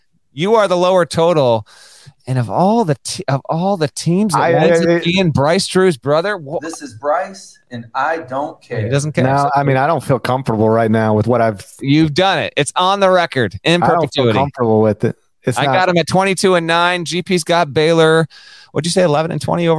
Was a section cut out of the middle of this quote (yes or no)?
no